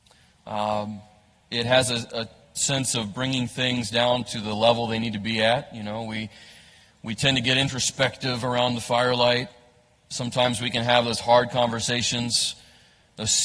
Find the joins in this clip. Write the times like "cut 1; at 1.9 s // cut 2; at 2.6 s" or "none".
none